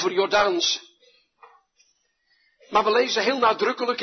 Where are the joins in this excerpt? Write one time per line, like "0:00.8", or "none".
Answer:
none